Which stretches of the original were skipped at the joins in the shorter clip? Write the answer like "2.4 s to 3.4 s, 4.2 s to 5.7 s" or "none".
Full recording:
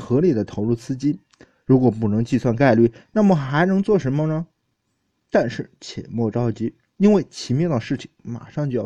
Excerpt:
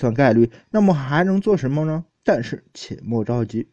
4.6 s to 5.2 s